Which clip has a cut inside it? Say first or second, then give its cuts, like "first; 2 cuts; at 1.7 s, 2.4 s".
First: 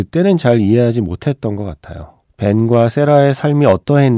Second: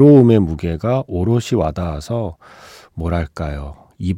first; 1 cut; at 2.2 s